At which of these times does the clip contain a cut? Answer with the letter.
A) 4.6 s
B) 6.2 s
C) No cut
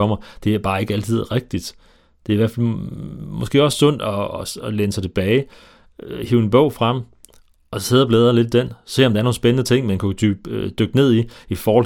A